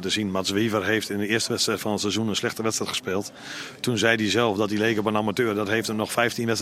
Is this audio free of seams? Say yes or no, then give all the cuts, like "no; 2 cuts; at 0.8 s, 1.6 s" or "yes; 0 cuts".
yes; 0 cuts